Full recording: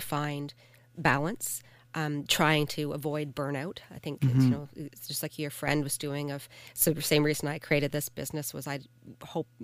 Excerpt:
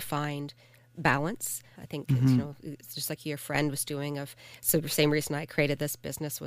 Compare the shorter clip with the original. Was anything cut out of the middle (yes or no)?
yes